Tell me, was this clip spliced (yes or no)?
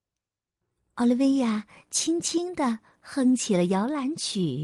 no